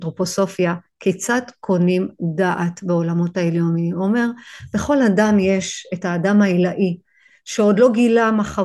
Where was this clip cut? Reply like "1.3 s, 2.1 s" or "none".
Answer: none